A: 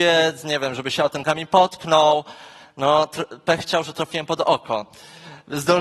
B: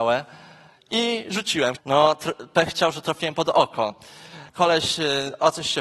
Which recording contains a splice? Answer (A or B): B